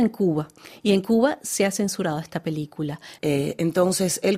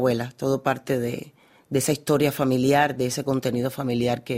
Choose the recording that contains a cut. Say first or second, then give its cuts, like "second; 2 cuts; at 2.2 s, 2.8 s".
first; 1 cut; at 3.2 s